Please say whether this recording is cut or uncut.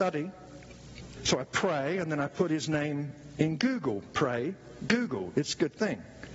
cut